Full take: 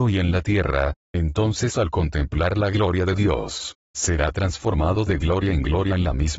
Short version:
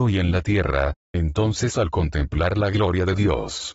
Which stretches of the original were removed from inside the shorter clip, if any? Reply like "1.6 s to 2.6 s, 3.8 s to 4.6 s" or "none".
none